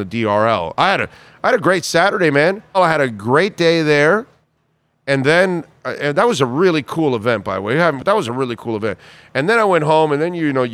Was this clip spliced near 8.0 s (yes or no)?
yes